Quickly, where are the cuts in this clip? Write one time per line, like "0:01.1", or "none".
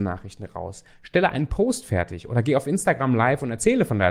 none